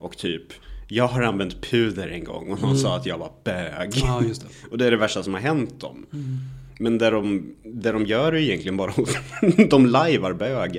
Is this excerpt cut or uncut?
uncut